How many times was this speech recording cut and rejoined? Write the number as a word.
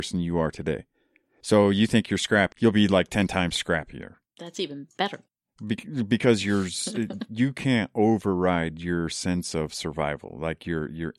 two